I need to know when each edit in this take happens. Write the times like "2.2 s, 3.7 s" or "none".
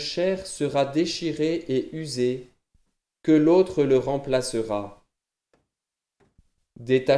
none